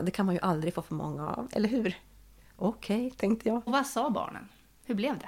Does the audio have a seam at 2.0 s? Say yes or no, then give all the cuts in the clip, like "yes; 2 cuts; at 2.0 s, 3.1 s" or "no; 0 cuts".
no; 1 cut; at 3.7 s